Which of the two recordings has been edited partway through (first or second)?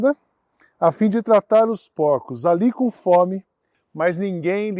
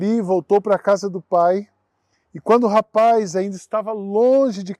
first